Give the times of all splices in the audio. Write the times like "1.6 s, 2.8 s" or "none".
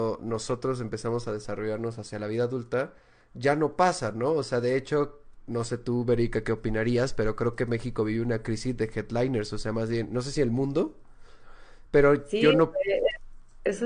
none